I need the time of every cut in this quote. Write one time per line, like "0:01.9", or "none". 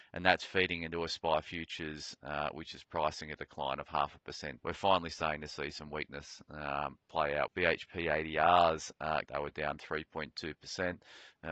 0:04.6
0:07.5
0:09.3